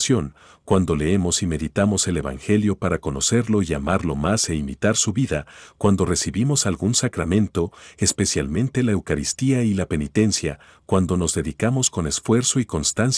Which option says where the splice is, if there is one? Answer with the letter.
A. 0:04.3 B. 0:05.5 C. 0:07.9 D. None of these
D